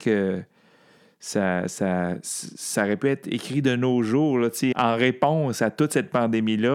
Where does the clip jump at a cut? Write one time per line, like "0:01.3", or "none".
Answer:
0:04.7